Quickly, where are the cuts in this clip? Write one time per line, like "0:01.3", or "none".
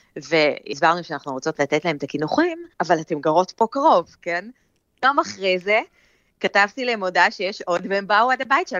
0:02.7